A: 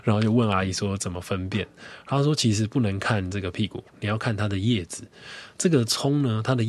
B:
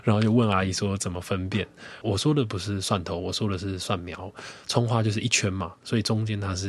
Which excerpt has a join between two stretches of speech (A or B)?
B